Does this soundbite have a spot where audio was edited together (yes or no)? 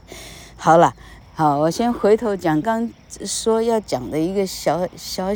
yes